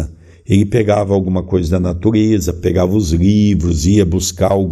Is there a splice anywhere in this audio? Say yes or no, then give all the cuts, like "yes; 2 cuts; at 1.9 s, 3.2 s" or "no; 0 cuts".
no; 0 cuts